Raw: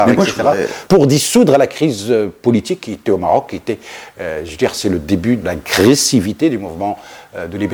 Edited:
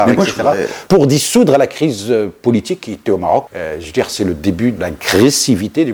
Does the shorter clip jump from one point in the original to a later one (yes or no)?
yes